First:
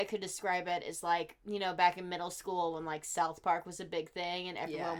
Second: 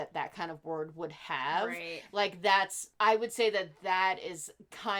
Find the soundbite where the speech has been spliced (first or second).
second